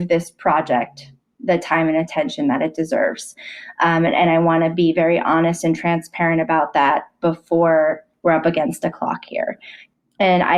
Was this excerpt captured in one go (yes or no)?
yes